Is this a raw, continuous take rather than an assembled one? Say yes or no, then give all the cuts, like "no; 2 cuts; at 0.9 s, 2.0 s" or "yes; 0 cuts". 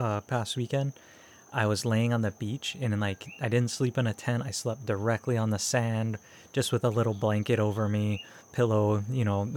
yes; 0 cuts